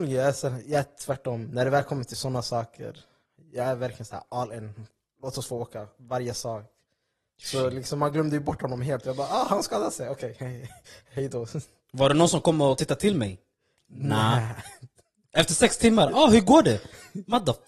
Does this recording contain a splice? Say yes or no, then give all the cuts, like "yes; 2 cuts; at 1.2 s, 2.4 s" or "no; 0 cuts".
no; 0 cuts